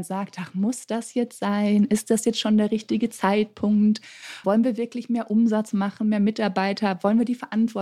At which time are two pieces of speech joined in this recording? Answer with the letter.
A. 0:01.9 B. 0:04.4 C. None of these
B